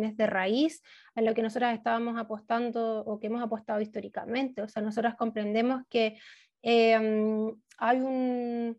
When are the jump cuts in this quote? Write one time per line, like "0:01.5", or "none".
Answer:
none